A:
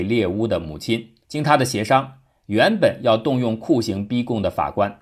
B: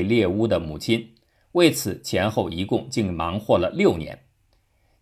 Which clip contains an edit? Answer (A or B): A